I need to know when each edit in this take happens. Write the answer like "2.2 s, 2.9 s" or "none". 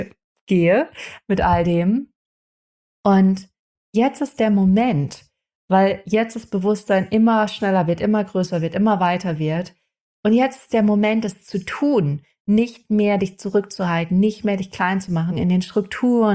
15.3 s